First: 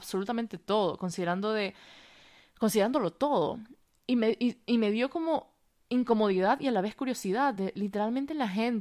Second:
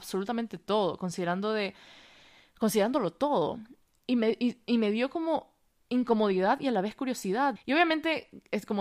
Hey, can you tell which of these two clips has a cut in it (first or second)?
second